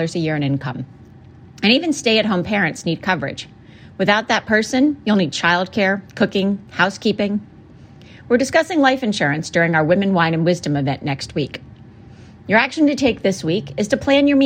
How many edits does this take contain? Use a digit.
0